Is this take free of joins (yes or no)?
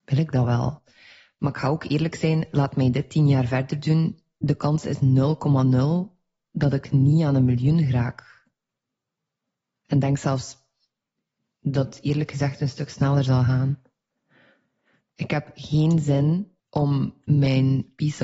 no